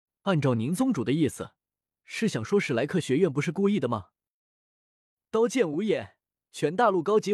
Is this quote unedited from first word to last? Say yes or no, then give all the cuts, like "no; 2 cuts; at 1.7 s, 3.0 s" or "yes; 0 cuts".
yes; 0 cuts